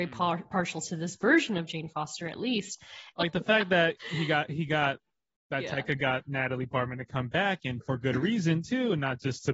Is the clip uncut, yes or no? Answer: no